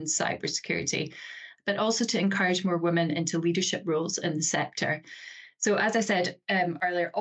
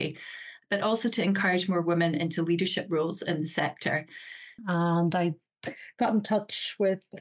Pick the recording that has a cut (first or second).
second